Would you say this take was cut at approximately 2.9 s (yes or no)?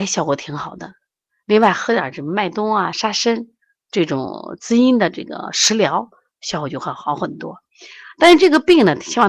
no